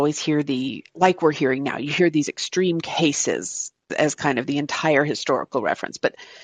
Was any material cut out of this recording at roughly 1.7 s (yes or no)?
no